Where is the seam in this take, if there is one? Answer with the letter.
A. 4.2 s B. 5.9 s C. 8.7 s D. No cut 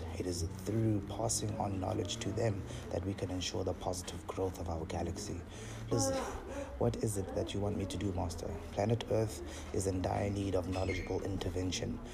B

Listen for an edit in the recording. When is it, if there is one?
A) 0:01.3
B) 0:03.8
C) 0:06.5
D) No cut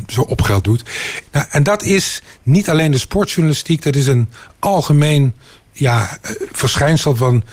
A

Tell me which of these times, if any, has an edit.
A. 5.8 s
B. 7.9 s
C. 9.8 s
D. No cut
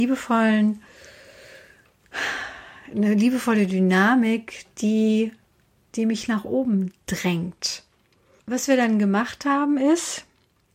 D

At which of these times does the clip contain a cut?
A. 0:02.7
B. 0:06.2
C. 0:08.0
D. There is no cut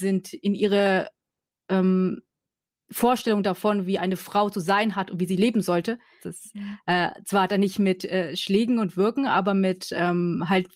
B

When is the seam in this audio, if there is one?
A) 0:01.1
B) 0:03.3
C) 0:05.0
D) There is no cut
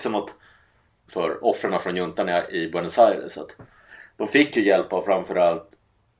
A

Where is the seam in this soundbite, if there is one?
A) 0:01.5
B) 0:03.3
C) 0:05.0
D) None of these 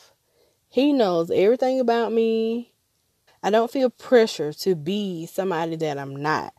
B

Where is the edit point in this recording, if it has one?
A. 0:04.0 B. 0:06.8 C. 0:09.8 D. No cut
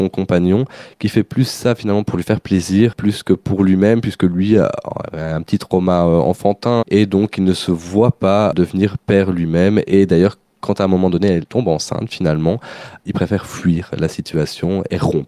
B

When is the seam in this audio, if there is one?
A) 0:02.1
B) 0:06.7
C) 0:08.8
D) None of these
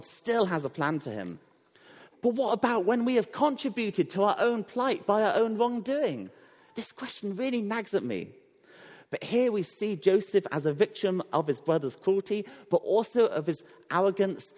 A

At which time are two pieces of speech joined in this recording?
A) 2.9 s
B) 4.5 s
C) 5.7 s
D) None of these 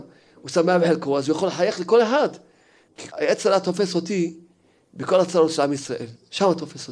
A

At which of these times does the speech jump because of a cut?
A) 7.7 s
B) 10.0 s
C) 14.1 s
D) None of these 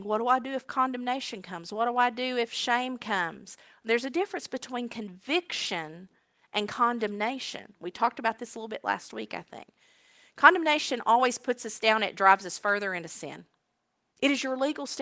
C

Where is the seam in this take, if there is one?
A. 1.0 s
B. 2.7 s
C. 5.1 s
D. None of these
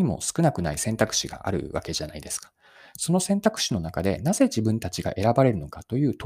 D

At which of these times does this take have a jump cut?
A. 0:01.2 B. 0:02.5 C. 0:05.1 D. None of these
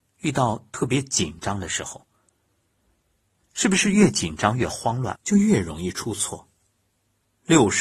C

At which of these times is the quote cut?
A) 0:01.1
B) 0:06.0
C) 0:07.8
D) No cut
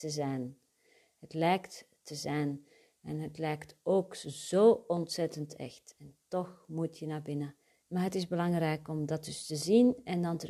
C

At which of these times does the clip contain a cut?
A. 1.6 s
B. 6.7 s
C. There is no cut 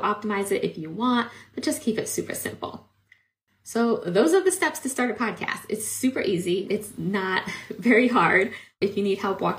B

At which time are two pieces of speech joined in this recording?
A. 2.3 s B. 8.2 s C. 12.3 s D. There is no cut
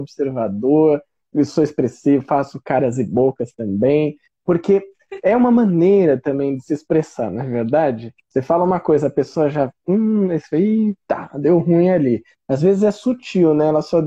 D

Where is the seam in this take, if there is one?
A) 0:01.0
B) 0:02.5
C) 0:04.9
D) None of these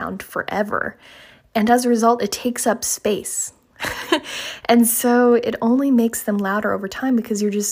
D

